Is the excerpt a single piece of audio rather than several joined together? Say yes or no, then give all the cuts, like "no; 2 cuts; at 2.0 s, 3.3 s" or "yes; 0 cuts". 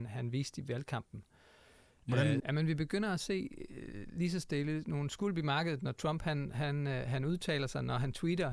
no; 1 cut; at 2.4 s